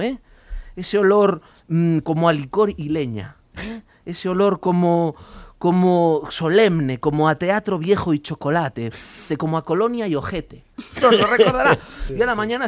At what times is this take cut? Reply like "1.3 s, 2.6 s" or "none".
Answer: 9.3 s, 11.0 s